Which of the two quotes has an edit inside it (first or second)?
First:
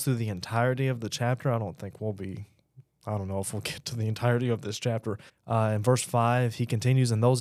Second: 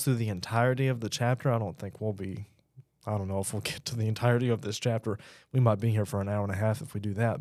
first